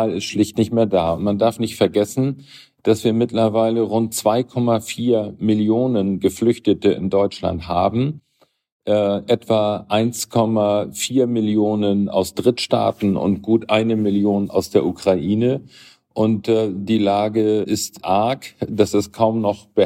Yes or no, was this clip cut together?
yes